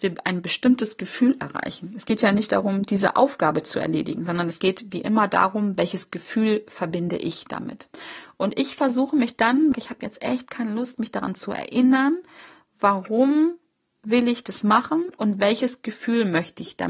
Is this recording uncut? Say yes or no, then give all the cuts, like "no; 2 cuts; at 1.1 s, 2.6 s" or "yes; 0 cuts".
no; 1 cut; at 9.7 s